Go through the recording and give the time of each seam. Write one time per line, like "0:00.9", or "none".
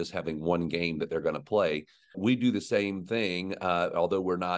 0:02.1